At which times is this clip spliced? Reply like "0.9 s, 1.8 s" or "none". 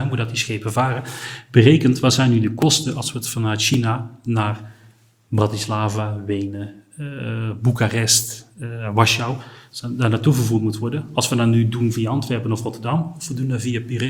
none